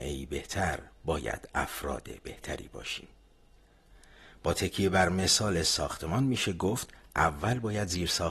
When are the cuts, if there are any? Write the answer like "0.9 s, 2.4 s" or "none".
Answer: none

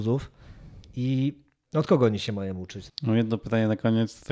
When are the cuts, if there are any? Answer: 2.9 s

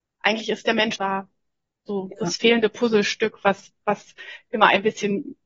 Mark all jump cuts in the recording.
1.0 s

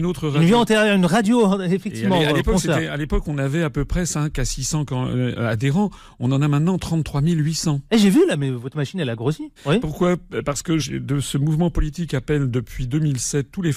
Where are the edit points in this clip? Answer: 9.6 s, 10.8 s

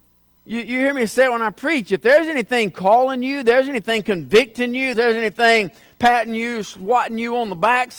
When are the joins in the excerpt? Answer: 4.9 s

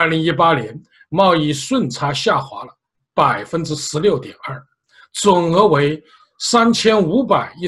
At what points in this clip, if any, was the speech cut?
none

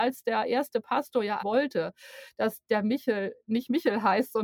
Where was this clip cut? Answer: 1.4 s

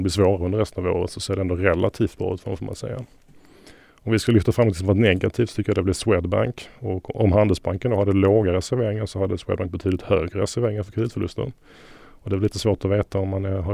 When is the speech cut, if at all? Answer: none

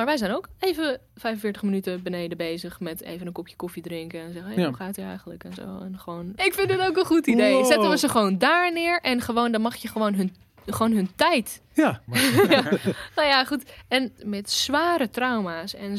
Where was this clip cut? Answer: 6.4 s, 12.1 s, 14.2 s

